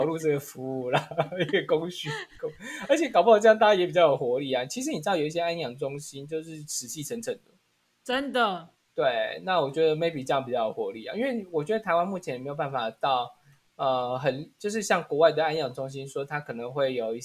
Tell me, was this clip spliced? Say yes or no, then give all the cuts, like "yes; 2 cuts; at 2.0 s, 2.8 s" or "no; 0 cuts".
no; 0 cuts